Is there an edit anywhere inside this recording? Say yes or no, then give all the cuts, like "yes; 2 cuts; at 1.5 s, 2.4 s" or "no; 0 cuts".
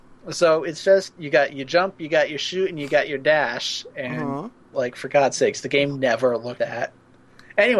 yes; 2 cuts; at 4.7 s, 6.6 s